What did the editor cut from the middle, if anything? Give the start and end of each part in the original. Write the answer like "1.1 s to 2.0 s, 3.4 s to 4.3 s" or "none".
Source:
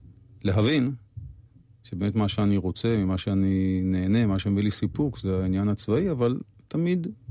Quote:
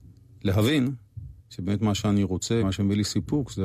1.4 s to 1.7 s, 3.0 s to 4.3 s